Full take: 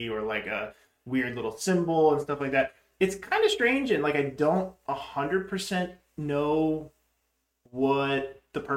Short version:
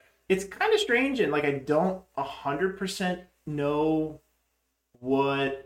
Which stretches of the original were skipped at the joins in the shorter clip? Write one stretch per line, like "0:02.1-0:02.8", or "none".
none